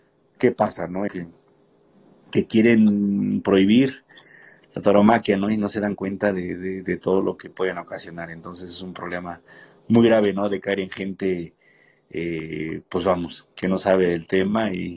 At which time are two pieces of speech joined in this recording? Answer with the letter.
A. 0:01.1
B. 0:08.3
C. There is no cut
A